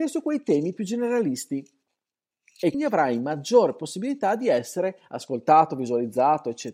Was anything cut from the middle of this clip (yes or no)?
yes